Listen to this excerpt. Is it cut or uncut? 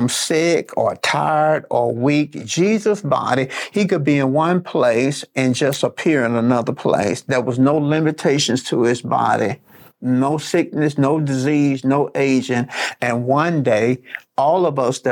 uncut